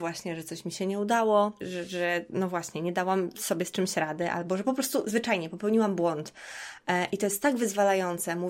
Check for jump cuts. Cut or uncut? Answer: cut